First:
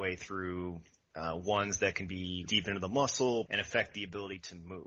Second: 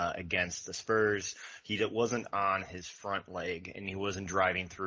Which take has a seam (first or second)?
first